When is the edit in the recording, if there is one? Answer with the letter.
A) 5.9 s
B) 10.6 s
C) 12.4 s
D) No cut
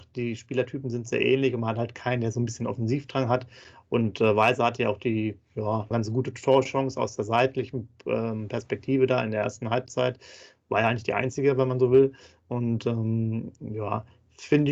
A